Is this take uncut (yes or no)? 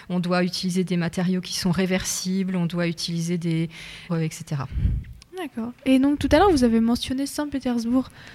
no